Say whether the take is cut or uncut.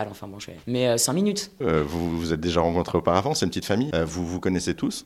cut